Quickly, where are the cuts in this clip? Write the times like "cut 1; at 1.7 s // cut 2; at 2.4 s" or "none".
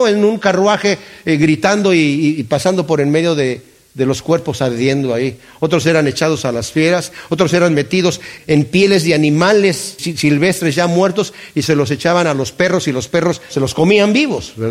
cut 1; at 8.4 s // cut 2; at 10.0 s